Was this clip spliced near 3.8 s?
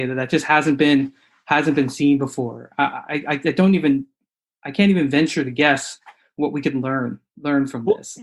no; 1 cut; at 7.3 s

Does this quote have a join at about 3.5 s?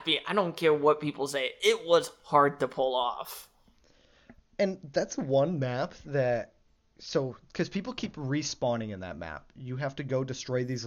no; 0 cuts

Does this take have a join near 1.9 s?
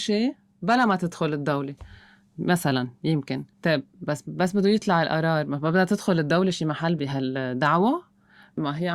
no; 1 cut; at 3.5 s

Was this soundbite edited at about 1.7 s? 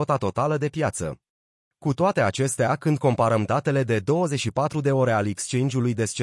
yes; 1 cut; at 1.7 s

